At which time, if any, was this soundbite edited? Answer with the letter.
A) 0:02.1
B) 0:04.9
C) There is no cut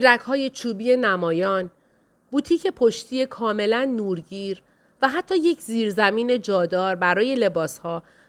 A